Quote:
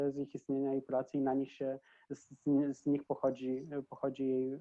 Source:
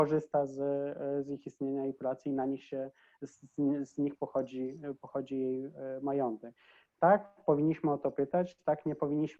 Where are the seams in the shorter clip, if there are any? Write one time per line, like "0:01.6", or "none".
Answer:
none